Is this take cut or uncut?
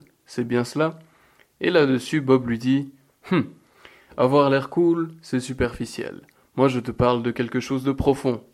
uncut